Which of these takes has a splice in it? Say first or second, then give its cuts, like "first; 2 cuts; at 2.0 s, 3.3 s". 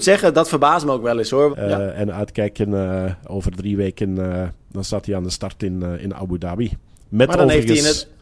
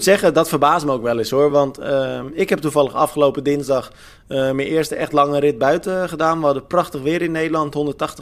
first; 1 cut; at 1.5 s